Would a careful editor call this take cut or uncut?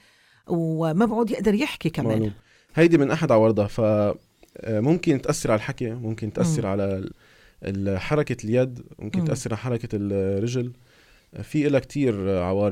uncut